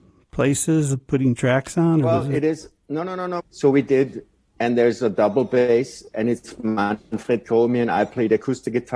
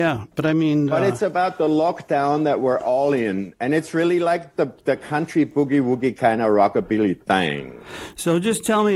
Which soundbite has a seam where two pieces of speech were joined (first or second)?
first